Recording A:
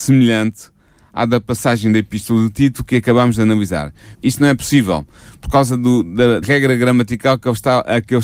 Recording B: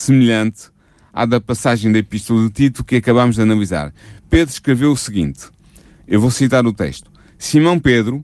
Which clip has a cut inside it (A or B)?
A